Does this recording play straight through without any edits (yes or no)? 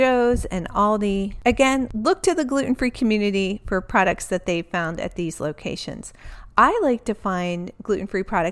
yes